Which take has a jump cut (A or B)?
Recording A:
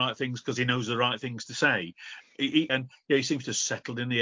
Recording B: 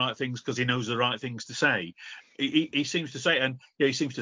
A